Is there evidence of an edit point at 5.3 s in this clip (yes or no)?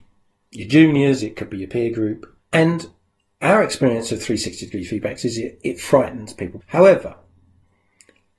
no